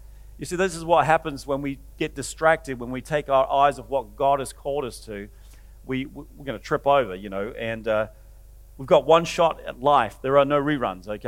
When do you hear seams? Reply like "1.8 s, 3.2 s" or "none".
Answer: none